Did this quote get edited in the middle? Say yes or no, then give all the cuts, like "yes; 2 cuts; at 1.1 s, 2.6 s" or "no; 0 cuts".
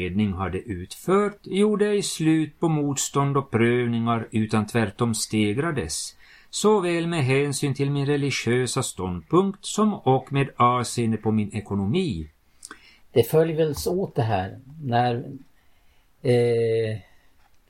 yes; 1 cut; at 13.0 s